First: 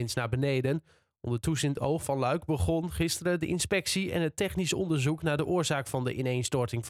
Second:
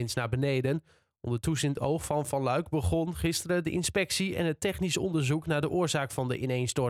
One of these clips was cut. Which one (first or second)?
first